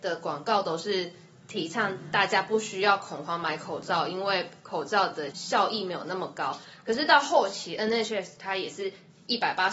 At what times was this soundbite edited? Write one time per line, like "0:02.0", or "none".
0:05.3